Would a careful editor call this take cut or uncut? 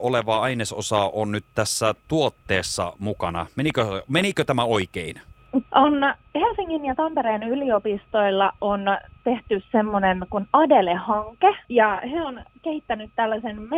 cut